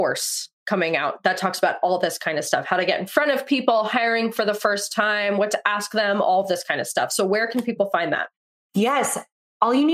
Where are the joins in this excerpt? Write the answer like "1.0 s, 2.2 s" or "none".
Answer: none